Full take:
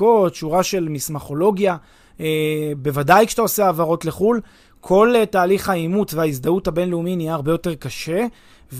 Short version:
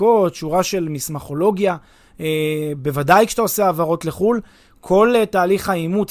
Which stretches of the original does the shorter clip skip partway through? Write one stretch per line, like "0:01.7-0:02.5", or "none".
none